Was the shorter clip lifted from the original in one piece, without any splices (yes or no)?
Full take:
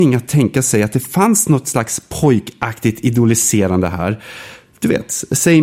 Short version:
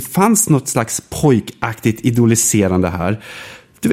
yes